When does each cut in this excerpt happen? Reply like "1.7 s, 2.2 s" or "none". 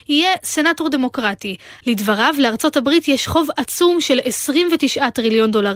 1.8 s